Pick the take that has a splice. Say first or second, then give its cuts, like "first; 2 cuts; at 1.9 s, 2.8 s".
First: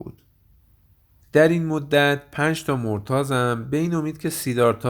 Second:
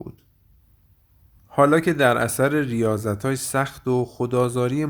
first; 1 cut; at 1.2 s